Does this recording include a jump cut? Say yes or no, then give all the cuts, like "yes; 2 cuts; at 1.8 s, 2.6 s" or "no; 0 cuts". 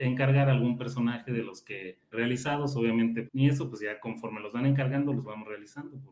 yes; 2 cuts; at 2.1 s, 3.3 s